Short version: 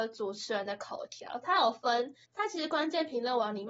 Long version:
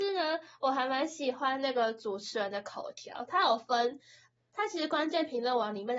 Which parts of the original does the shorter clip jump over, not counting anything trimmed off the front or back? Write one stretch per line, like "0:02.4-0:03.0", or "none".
0:04.1-0:04.4